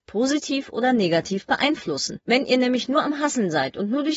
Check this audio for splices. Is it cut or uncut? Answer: uncut